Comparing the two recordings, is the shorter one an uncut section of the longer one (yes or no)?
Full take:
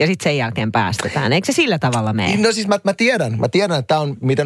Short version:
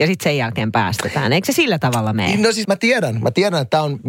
no